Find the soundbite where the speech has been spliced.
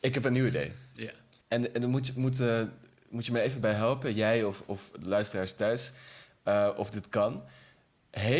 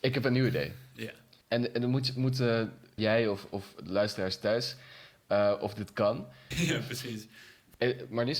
second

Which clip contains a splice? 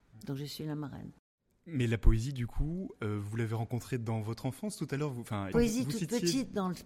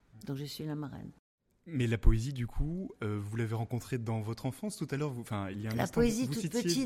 first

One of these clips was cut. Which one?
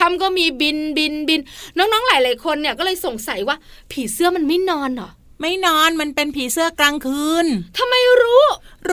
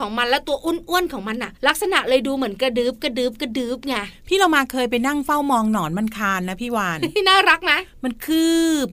second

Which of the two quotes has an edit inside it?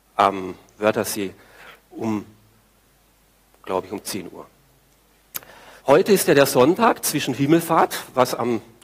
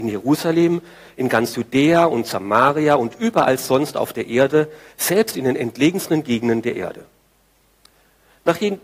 first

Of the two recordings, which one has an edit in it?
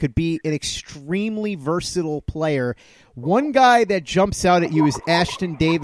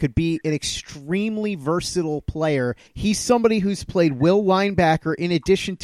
second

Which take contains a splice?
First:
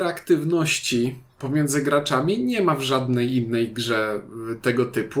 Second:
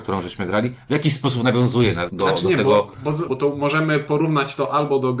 second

